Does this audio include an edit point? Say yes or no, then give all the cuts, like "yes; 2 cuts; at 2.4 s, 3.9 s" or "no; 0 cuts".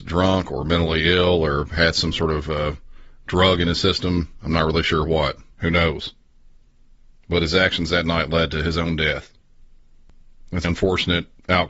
yes; 2 cuts; at 5.6 s, 10.6 s